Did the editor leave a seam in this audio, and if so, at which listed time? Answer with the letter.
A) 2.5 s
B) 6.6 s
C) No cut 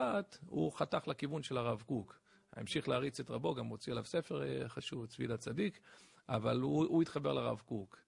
C